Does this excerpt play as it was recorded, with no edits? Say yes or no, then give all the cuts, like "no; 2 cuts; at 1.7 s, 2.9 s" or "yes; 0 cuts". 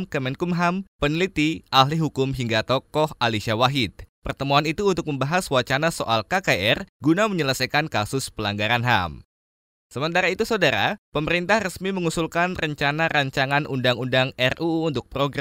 yes; 0 cuts